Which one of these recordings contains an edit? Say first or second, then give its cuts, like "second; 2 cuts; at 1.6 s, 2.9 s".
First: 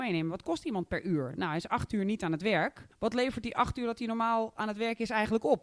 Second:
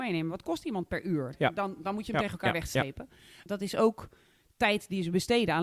second; 2 cuts; at 1.3 s, 3.5 s